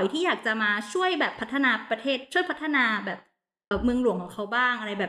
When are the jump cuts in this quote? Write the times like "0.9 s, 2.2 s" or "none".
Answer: 3.7 s

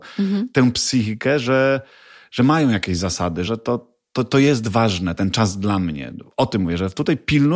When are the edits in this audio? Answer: 3.5 s

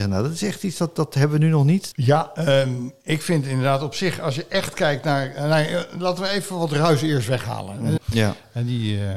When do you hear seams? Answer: 1.9 s, 8.0 s

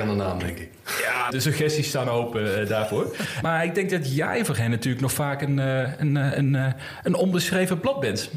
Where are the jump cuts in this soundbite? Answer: 1.3 s, 3.4 s

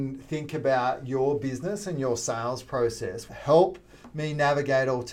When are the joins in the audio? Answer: 3.3 s

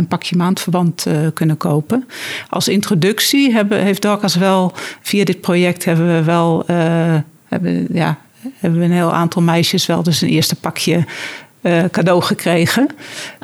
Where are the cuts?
none

